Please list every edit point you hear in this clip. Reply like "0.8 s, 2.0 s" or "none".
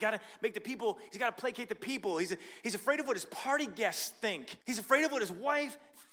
4.6 s